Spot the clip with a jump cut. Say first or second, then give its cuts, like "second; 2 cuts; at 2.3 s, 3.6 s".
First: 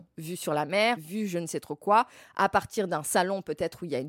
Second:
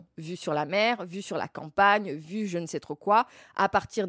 first; 1 cut; at 1.0 s